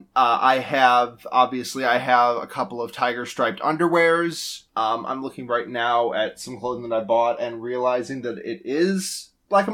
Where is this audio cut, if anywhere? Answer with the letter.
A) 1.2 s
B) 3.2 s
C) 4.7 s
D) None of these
C